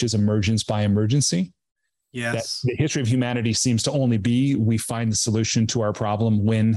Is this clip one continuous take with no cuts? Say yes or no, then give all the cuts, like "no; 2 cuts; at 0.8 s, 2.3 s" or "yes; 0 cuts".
yes; 0 cuts